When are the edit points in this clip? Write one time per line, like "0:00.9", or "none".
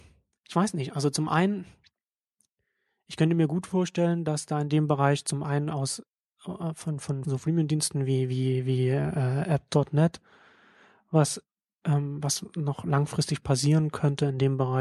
0:07.2